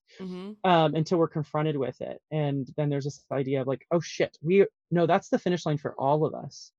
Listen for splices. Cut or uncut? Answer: uncut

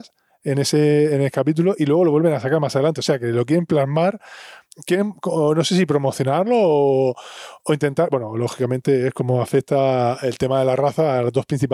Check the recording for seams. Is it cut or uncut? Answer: uncut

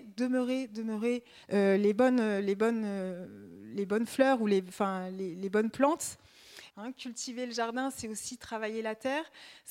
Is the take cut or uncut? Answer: cut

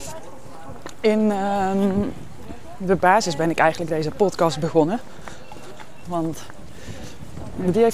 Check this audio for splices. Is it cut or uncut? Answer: cut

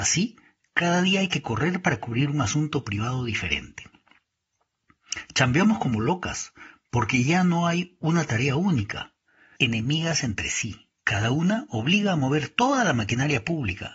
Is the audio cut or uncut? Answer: cut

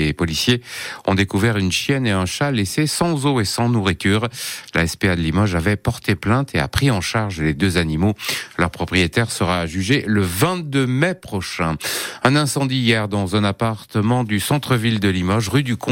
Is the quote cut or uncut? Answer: uncut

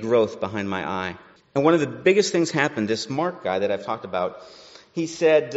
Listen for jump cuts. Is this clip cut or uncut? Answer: cut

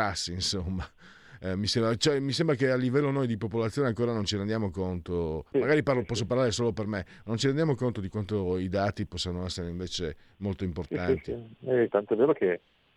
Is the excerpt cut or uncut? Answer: cut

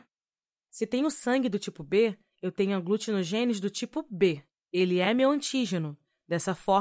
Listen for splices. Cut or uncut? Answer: uncut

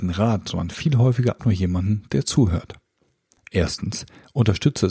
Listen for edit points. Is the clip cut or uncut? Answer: cut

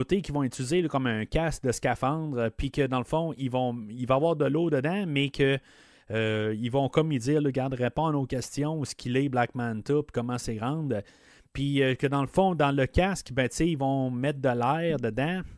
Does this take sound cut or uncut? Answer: uncut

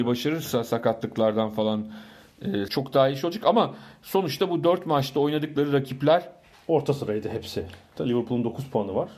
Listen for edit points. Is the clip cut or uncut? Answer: cut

